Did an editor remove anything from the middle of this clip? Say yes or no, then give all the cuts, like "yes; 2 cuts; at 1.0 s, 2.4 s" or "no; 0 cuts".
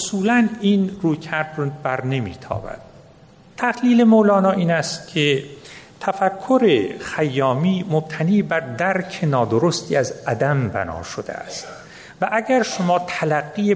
no; 0 cuts